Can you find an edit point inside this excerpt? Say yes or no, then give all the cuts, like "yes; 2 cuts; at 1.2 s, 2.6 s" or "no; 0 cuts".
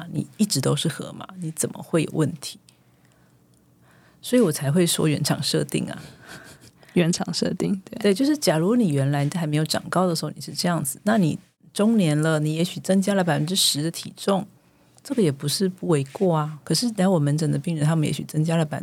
no; 0 cuts